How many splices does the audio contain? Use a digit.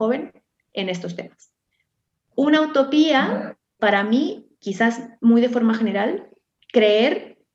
1